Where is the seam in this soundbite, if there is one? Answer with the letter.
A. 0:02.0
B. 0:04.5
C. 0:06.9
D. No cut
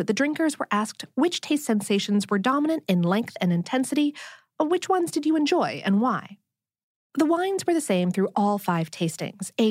B